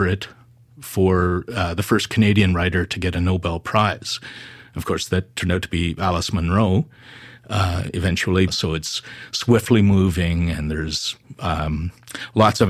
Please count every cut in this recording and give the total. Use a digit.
1